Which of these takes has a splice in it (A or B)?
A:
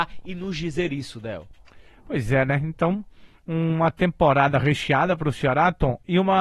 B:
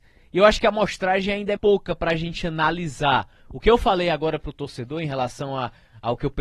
B